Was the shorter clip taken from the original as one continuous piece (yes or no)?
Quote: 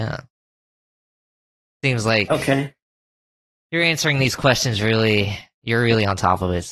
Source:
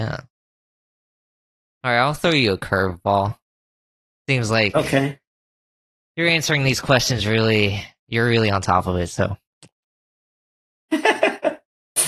no